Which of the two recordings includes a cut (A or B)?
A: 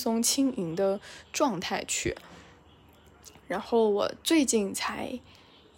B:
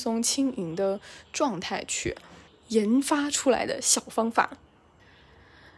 B